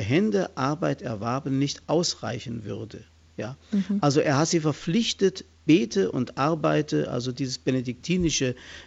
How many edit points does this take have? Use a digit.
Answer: 0